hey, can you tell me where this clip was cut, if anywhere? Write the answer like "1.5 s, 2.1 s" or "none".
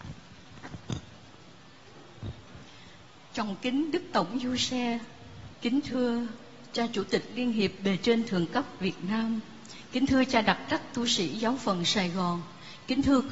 5.5 s